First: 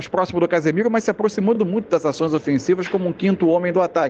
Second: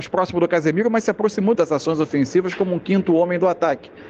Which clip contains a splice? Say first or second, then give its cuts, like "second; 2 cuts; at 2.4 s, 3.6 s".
second; 1 cut; at 1.5 s